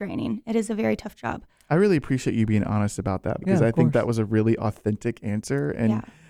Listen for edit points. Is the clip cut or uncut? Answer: cut